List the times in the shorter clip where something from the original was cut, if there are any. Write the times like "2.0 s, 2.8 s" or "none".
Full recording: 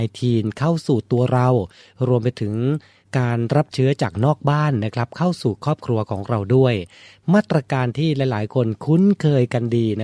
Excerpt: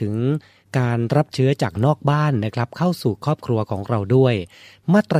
none